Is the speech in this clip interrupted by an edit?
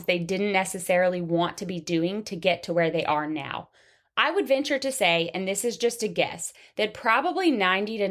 no; 0 cuts

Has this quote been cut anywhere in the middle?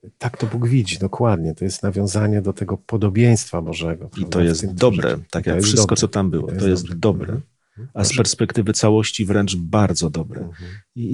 no; 0 cuts

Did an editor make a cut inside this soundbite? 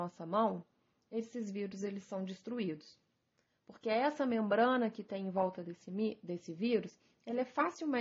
no; 0 cuts

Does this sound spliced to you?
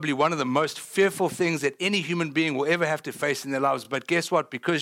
no; 0 cuts

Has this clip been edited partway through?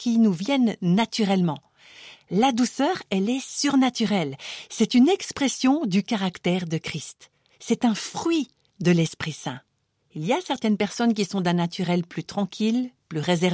yes; 2 cuts; at 2.2 s, 10.0 s

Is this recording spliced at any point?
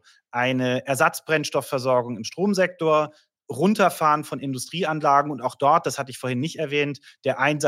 no; 0 cuts

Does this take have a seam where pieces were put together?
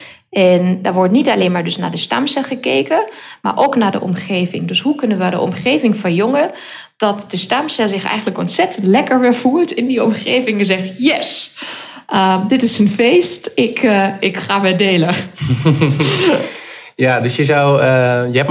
no; 0 cuts

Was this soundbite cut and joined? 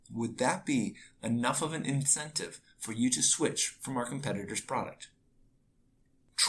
no; 0 cuts

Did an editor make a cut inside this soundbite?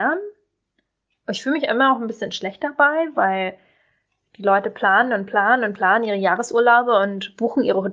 no; 0 cuts

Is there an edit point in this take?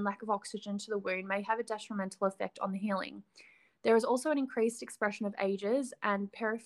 no; 0 cuts

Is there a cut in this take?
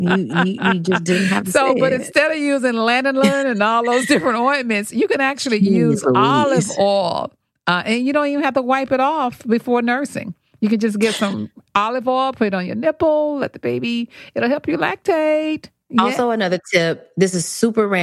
no; 0 cuts

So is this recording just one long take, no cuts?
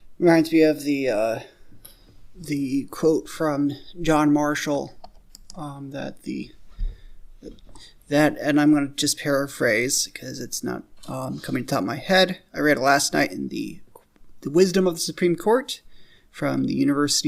yes; 0 cuts

